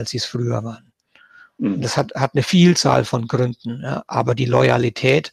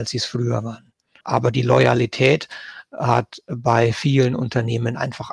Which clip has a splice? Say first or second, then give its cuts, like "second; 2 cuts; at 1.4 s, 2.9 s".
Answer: second; 1 cut; at 1.2 s